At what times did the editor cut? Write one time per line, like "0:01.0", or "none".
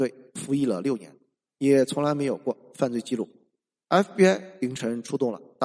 0:01.4
0:03.8